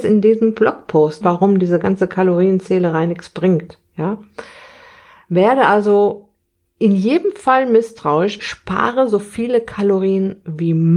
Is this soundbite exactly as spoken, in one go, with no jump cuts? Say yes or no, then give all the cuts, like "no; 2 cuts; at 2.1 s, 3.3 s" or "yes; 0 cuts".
no; 2 cuts; at 1.2 s, 8.4 s